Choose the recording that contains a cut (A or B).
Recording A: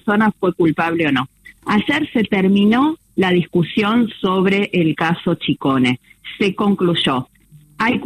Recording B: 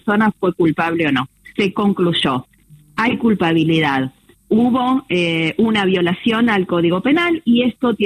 B